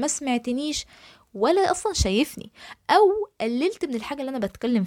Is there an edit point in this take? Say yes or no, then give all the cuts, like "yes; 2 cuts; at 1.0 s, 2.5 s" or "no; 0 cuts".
no; 0 cuts